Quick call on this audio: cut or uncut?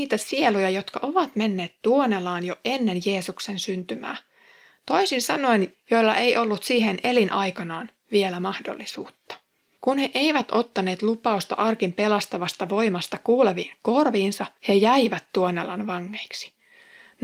cut